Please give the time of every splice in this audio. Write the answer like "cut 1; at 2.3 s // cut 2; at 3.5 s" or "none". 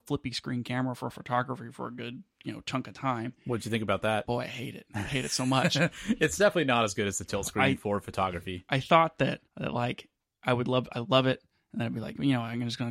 cut 1; at 9.5 s